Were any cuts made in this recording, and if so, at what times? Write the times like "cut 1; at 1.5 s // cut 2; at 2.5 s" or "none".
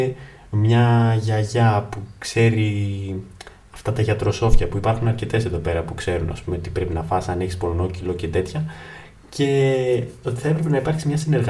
none

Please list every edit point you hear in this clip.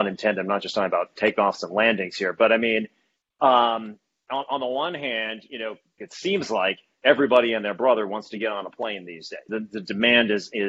cut 1; at 6.0 s // cut 2; at 9.5 s

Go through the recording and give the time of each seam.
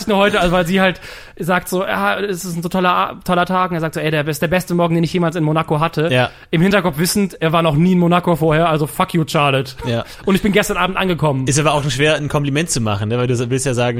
none

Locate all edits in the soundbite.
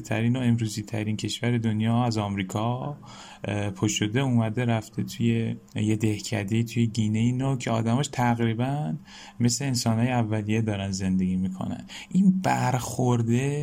cut 1; at 5.7 s

